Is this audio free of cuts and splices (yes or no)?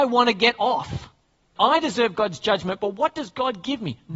no